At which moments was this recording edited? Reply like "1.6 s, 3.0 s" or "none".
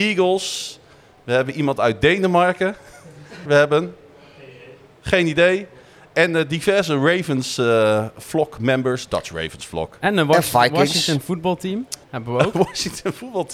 3.5 s, 12.0 s